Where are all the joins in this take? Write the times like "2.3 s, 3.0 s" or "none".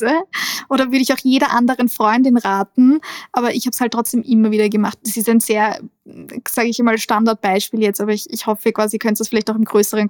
none